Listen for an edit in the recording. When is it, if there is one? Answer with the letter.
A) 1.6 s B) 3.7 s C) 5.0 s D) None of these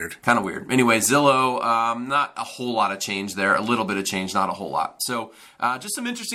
D